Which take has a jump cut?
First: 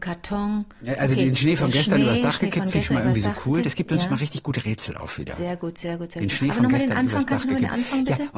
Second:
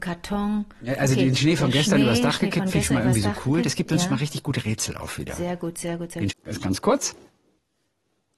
second; 1 cut; at 6.3 s

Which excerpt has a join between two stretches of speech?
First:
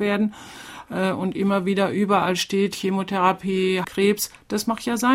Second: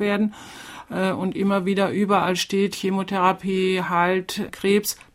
first; 1 cut; at 3.8 s

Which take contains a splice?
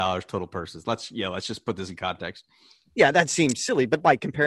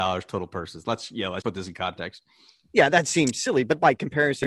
second; 1 cut; at 1.4 s

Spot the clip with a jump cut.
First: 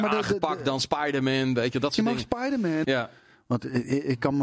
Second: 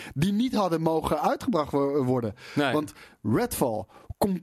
first; 1 cut; at 2.8 s

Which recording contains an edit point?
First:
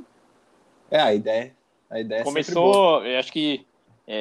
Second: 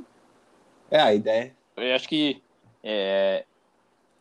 second; 1 cut; at 1.8 s

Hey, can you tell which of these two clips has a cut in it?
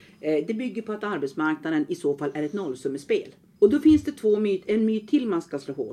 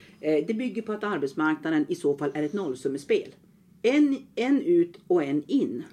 first; 1 cut; at 3.6 s

